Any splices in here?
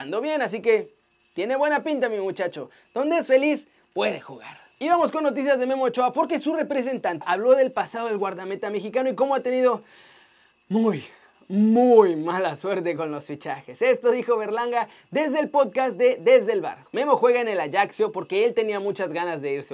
yes; 1 cut; at 7.2 s

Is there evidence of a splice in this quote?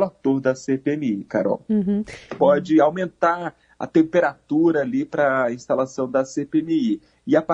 yes; 1 cut; at 2.4 s

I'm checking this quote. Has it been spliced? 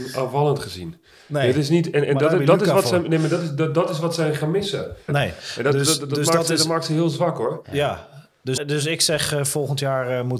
yes; 2 cuts; at 5.1 s, 8.6 s

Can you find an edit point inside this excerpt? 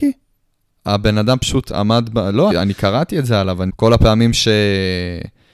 yes; 2 cuts; at 2.5 s, 3.7 s

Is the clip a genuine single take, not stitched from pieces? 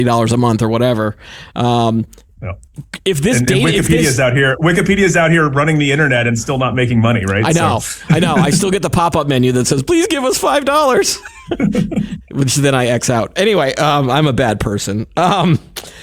yes; 0 cuts

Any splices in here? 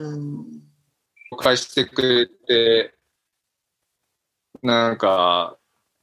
yes; 1 cut; at 1.3 s

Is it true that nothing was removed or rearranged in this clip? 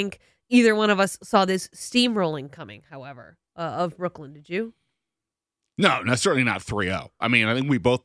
yes; 0 cuts

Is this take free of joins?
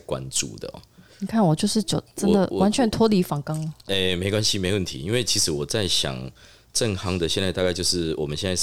yes; 0 cuts

